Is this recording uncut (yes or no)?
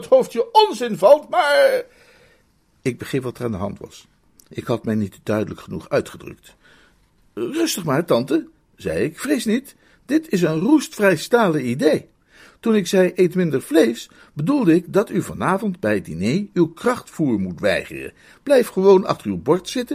yes